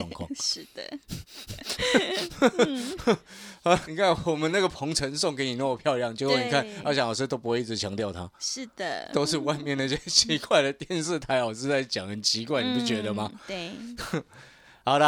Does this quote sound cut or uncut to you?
cut